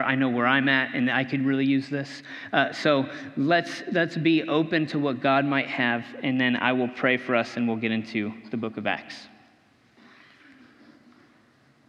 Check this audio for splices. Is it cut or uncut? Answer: uncut